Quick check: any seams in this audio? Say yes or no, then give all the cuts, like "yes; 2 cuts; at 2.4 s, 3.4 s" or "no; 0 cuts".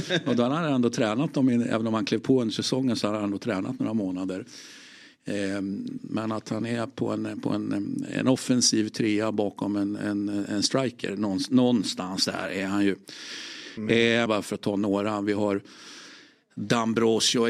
yes; 2 cuts; at 6.0 s, 14.3 s